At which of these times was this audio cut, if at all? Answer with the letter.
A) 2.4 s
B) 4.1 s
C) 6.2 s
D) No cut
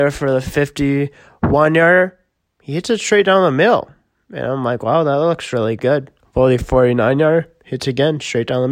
C